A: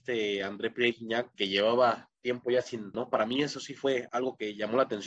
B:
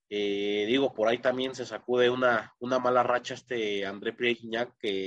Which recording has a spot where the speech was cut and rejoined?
A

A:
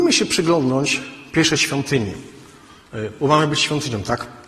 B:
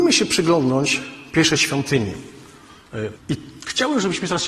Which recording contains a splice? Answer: B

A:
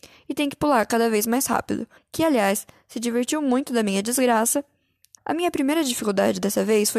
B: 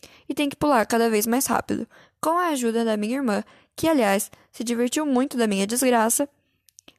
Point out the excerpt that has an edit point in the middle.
A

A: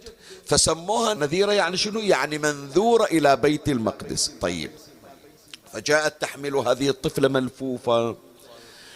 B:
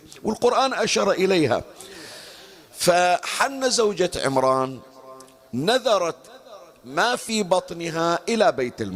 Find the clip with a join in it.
A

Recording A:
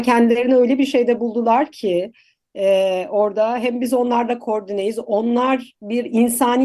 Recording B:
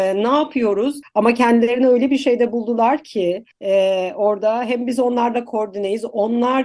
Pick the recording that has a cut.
B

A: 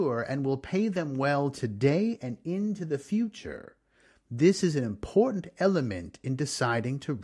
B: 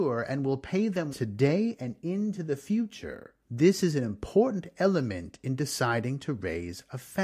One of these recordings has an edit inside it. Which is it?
B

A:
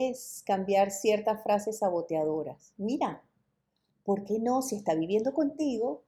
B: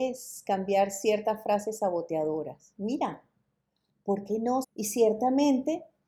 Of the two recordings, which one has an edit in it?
B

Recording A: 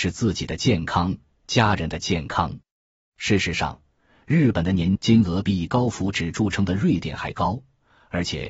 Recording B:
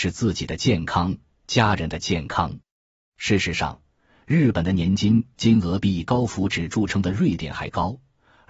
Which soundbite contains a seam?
A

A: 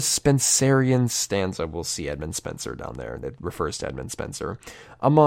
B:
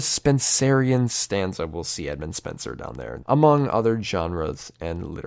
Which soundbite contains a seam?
B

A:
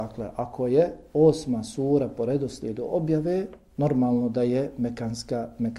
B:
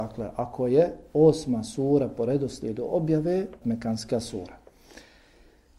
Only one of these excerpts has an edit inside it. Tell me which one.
B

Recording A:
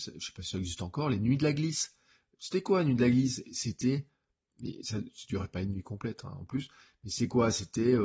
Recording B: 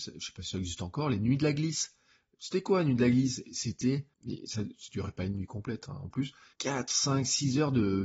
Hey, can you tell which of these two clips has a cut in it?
B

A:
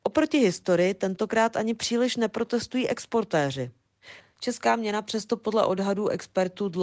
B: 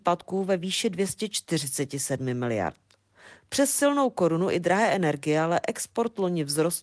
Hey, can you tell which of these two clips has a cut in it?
A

